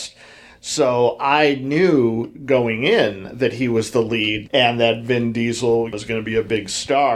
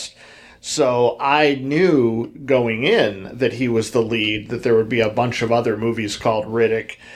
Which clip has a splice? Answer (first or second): first